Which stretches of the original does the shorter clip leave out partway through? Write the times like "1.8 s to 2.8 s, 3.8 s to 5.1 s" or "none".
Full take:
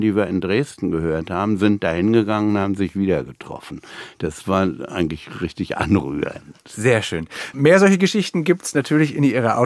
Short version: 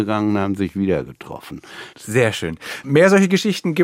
4.1 s to 6.6 s